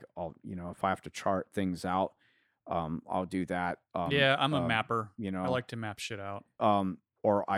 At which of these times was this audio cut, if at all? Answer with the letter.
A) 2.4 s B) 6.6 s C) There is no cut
B